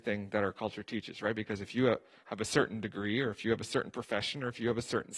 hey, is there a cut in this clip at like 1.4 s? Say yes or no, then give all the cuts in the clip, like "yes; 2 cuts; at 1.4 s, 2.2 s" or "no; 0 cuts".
no; 0 cuts